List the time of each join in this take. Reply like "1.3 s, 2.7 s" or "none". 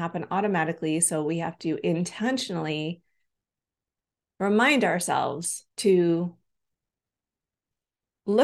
5.7 s